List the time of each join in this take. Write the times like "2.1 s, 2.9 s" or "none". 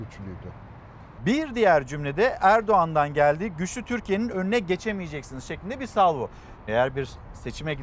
1.2 s, 6.7 s